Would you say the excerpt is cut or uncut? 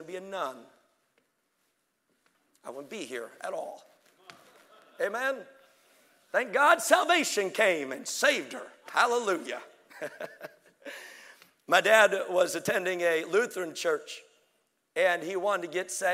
uncut